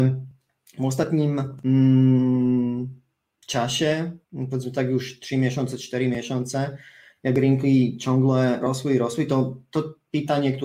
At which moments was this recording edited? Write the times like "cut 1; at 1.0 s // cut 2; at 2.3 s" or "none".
cut 1; at 4.2 s // cut 2; at 8.6 s